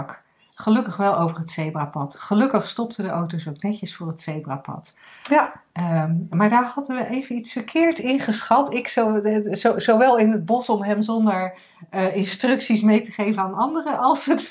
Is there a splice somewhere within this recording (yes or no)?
no